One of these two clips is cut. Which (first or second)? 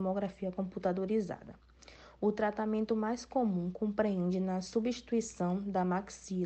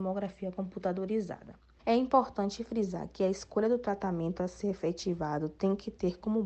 second